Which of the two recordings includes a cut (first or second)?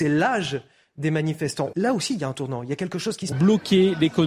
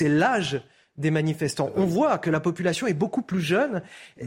first